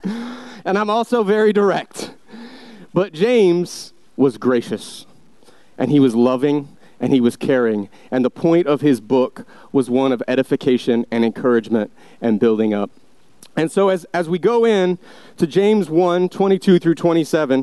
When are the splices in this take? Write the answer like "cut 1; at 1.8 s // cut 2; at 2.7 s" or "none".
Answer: cut 1; at 4.0 s

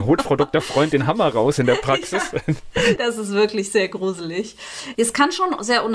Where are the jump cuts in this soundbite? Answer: cut 1; at 3.0 s // cut 2; at 4.9 s

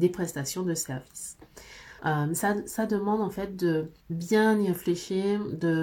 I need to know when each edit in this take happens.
cut 1; at 2.0 s // cut 2; at 4.0 s

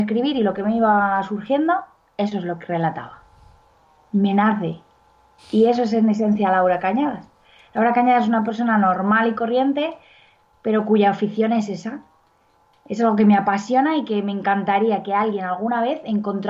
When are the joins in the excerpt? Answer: cut 1; at 5.4 s

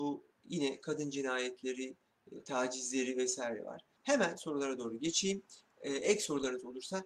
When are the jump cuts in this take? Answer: cut 1; at 4.0 s

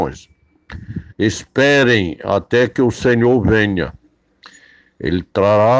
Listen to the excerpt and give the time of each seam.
cut 1; at 1.1 s

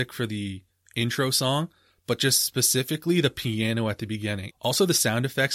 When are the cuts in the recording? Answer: cut 1; at 4.5 s

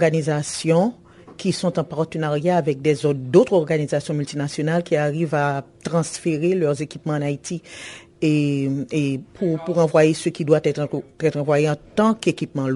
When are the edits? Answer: cut 1; at 8.1 s

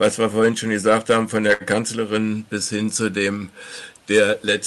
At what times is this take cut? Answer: none

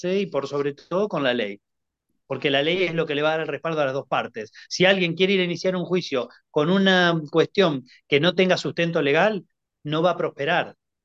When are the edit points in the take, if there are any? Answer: none

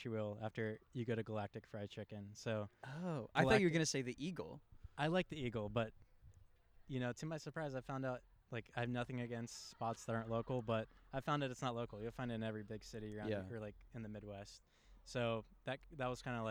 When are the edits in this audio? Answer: none

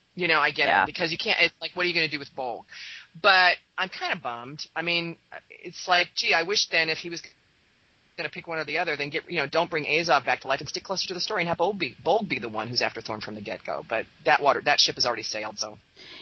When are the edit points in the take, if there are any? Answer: none

